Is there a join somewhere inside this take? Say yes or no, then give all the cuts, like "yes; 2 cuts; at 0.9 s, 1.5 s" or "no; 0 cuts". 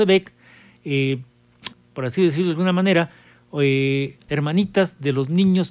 yes; 2 cuts; at 1.7 s, 4.3 s